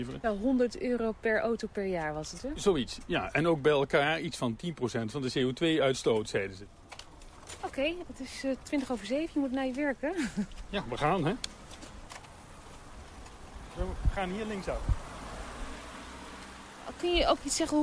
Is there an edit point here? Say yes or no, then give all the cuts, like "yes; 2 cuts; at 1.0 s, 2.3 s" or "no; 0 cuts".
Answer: no; 0 cuts